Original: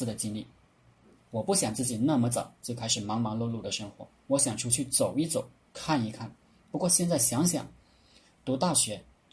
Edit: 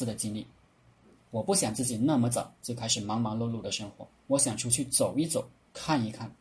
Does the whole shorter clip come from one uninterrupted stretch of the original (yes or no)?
yes